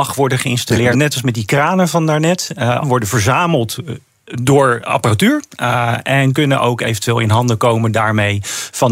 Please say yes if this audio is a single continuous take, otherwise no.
no